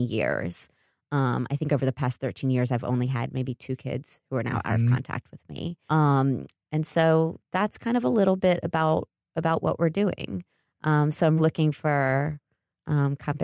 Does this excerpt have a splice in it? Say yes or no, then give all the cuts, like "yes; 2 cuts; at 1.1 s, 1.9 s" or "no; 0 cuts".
yes; 2 cuts; at 5.9 s, 11.4 s